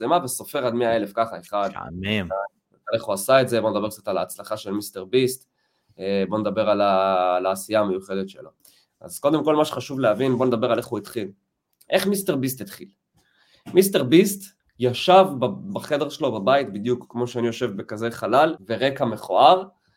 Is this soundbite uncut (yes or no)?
no